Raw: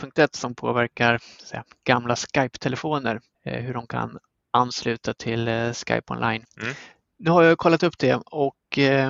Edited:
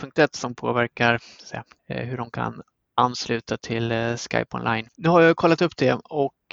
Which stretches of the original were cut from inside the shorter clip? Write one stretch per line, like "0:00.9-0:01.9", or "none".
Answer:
0:01.8-0:03.3
0:06.5-0:07.1